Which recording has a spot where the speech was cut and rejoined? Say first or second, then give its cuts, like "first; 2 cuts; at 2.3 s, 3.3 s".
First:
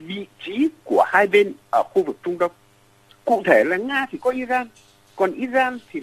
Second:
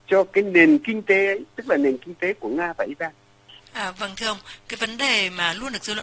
first; 1 cut; at 3.1 s